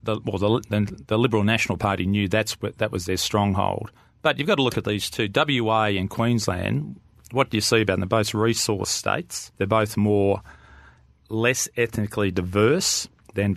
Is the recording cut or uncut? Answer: cut